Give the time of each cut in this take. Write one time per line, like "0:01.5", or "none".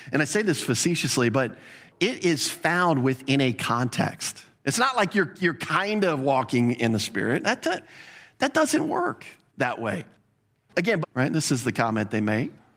0:04.6
0:11.0